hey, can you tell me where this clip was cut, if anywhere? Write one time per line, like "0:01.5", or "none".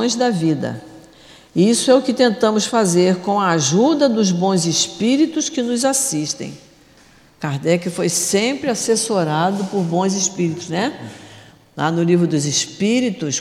none